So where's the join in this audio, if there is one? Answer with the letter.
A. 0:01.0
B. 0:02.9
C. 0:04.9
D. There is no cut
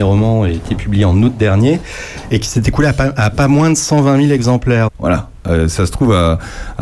C